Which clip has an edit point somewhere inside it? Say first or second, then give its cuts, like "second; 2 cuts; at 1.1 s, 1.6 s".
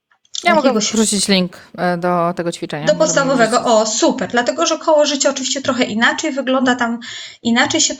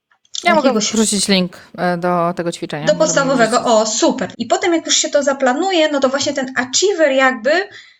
second; 1 cut; at 4.3 s